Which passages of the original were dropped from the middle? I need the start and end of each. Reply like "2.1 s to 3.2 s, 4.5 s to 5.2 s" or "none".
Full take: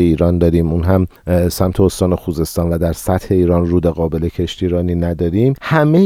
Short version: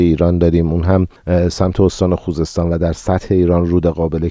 none